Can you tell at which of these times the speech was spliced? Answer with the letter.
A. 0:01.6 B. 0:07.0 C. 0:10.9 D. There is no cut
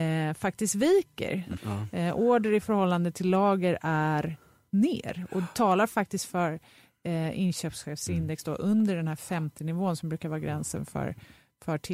A